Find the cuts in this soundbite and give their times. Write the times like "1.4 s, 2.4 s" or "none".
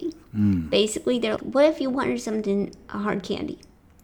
1.4 s